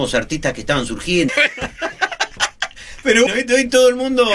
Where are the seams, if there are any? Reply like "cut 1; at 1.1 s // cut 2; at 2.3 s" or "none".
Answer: cut 1; at 1.3 s // cut 2; at 3.3 s